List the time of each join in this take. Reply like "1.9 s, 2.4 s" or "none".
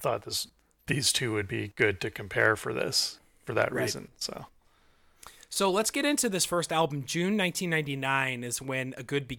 none